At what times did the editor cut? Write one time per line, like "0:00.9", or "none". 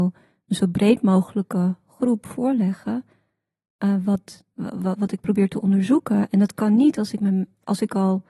0:04.5